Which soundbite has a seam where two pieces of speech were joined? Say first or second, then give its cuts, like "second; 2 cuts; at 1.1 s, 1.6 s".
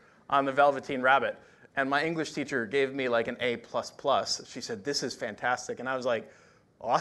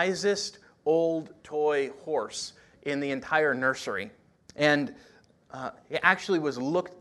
second; 1 cut; at 4.4 s